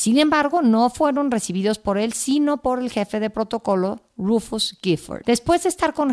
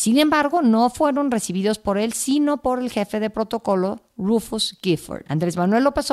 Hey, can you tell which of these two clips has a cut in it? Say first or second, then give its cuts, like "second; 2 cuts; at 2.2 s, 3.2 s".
first; 1 cut; at 5.2 s